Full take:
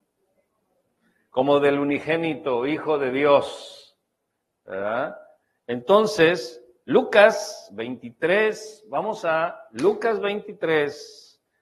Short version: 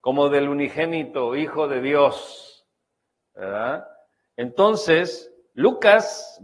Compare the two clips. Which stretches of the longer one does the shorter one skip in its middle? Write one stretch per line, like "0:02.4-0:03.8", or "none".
none